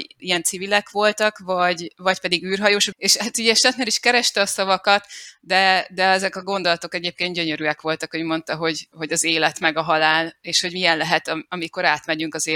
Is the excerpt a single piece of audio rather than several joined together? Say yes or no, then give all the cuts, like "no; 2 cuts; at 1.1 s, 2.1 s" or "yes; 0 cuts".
no; 1 cut; at 2.9 s